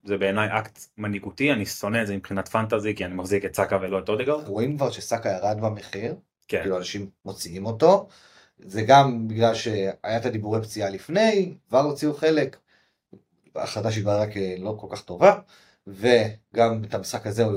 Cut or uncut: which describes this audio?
cut